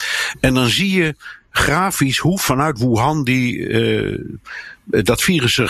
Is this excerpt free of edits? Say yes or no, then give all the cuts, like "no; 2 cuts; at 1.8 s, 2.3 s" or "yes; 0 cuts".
yes; 0 cuts